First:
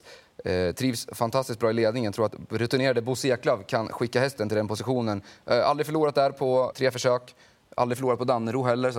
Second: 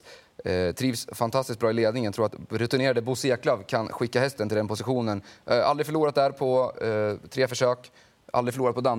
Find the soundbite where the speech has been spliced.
first; 1 cut; at 6.7 s

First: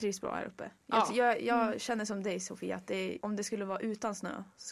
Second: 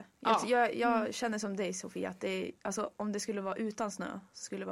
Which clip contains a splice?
first; 1 cut; at 3.2 s

